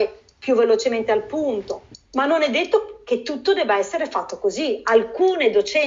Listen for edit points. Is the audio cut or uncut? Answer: cut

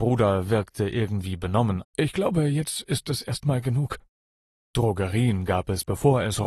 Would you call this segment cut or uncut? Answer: cut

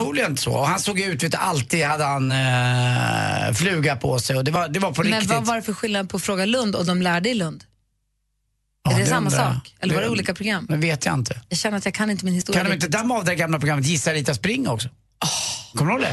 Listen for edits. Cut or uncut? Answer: uncut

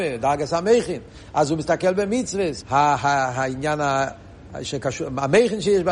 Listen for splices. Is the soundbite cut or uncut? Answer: cut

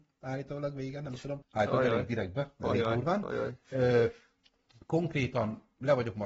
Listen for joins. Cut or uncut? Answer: cut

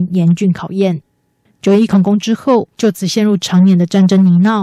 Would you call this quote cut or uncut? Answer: cut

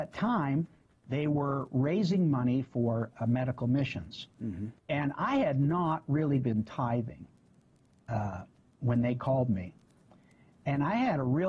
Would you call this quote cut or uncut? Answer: cut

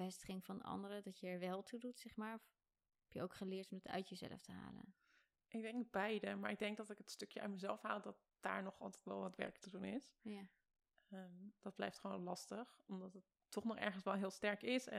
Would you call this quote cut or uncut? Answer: uncut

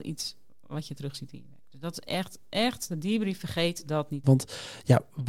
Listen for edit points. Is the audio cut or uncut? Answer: cut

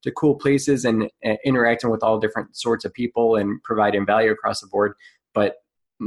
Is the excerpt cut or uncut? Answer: uncut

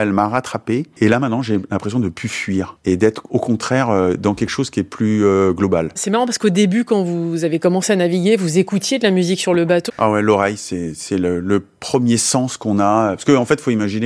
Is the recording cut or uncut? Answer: cut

